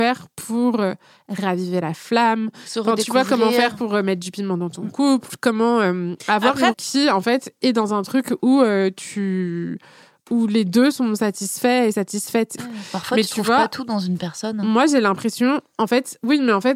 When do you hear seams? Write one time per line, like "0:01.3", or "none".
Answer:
0:06.7
0:12.6